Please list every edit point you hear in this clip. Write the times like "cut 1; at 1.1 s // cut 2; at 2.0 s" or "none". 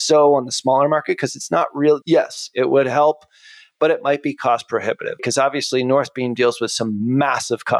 cut 1; at 2.0 s // cut 2; at 5.2 s